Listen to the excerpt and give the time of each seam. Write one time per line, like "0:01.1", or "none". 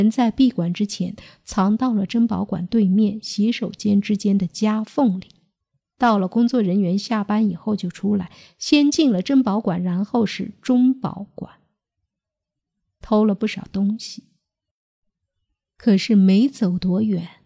none